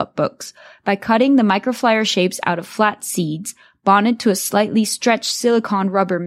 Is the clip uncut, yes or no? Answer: yes